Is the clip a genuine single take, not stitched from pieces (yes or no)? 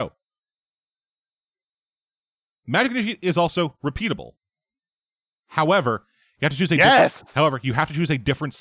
yes